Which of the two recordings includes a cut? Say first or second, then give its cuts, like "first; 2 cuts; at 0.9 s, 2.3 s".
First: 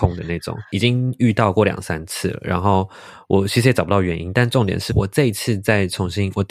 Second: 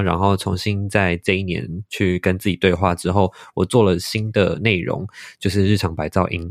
first; 1 cut; at 4.9 s